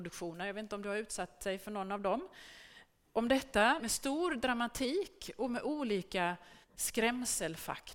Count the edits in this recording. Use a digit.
2